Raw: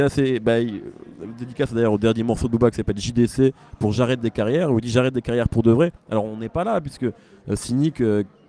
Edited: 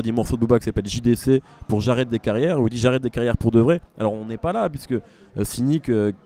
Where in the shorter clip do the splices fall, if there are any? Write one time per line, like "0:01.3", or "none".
none